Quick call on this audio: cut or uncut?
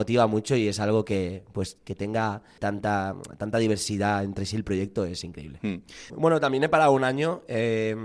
cut